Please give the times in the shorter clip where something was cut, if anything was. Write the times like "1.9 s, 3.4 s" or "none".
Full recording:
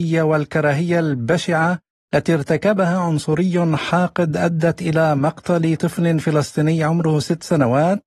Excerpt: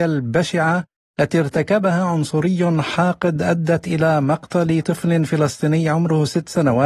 none